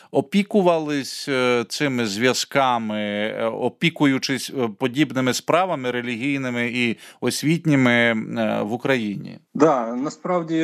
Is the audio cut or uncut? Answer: cut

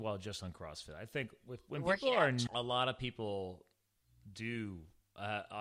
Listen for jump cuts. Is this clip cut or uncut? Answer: cut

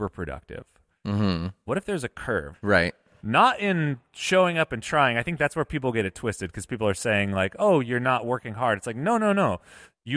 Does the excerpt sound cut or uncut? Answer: cut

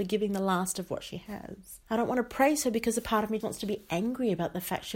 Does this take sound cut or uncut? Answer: cut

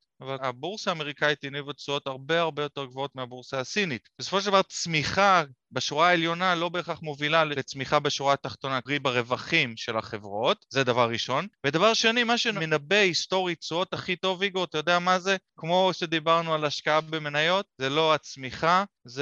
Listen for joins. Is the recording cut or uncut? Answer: uncut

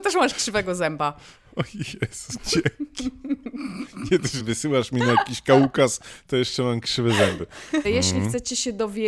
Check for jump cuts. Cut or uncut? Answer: cut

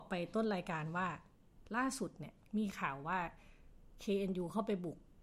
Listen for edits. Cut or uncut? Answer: cut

